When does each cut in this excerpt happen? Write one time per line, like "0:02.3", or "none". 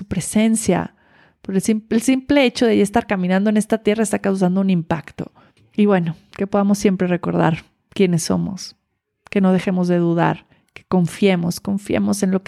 0:05.6